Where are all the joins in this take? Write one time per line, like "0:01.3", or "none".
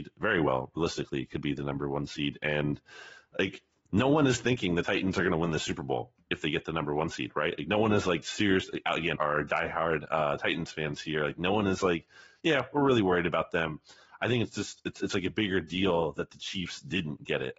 0:09.2